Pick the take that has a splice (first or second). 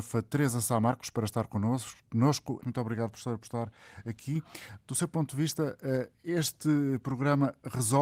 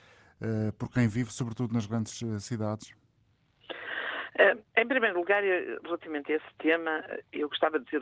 first